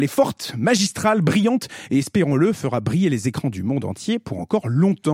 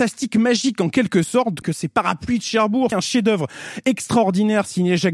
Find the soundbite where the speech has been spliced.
second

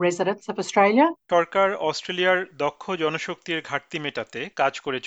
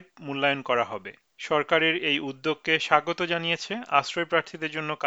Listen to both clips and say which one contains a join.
first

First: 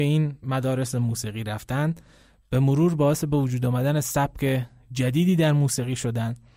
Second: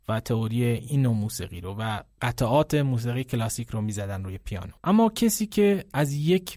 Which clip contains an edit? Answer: second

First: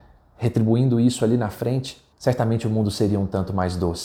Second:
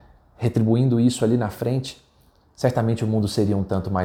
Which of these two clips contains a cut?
first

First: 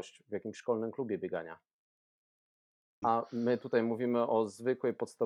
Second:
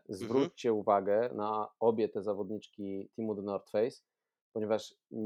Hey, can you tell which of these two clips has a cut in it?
first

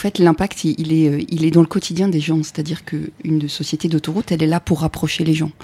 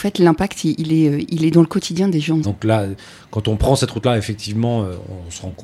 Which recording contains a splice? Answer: second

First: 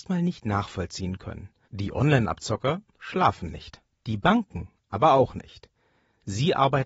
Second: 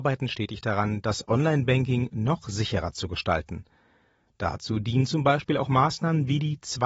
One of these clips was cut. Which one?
first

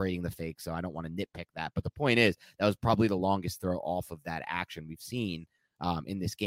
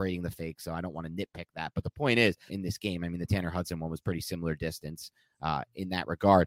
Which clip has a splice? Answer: second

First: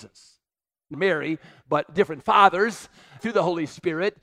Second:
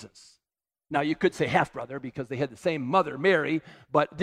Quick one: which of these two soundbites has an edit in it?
first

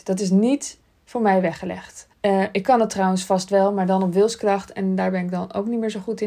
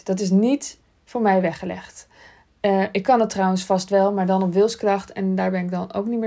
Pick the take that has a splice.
first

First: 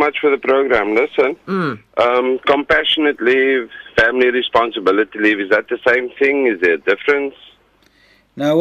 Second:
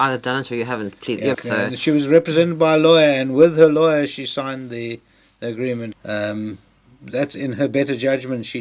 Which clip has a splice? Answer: second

